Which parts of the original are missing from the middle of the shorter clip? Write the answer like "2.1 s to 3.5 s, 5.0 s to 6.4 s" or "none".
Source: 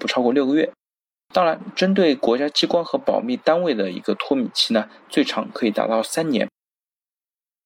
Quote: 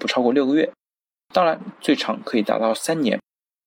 1.7 s to 5.0 s